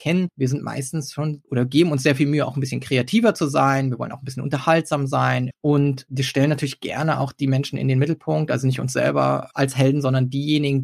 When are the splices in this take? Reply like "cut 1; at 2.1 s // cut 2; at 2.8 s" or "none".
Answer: cut 1; at 5.5 s